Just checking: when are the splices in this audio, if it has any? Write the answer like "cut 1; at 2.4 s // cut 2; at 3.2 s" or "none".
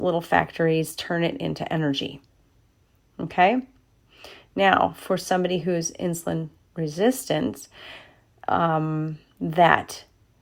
none